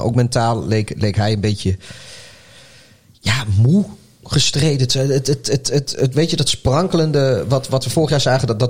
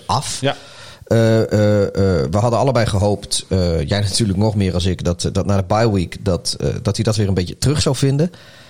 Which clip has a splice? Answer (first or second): first